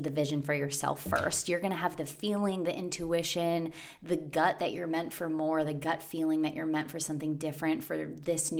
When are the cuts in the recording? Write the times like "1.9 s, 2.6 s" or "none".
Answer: none